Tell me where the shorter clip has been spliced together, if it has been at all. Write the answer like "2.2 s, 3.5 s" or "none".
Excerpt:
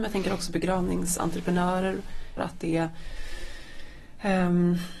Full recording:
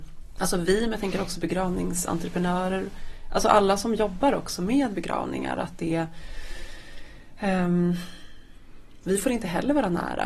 2.4 s